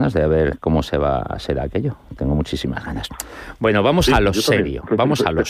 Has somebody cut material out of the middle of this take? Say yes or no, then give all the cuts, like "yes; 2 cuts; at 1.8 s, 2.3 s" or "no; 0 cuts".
no; 0 cuts